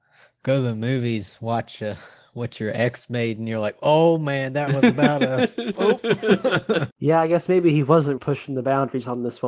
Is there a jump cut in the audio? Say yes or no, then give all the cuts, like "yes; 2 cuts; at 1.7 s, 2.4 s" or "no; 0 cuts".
yes; 2 cuts; at 6.9 s, 8.2 s